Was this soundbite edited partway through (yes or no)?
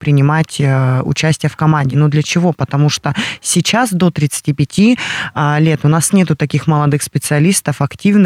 no